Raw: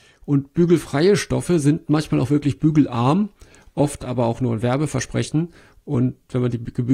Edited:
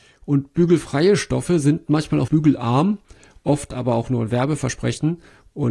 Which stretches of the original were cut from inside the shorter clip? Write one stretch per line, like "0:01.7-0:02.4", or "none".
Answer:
0:02.3-0:02.6